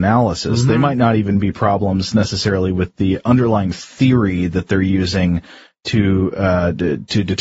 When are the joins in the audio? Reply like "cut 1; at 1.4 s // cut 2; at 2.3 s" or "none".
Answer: none